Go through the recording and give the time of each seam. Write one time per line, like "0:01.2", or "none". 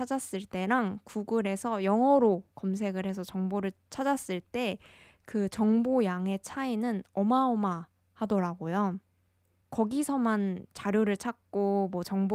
0:09.6